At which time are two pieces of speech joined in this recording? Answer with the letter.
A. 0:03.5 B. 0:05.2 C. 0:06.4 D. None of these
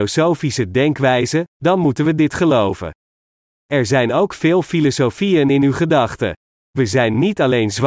D